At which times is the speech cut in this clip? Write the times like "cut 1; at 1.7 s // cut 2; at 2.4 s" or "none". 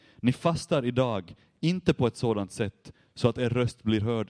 none